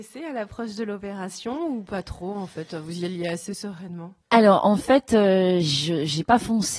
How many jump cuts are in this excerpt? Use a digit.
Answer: 2